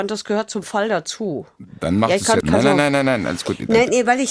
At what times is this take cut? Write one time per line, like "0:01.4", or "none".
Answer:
0:02.4